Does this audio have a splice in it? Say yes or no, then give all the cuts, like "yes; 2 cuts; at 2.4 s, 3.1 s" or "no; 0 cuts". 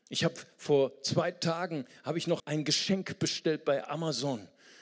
yes; 1 cut; at 2.4 s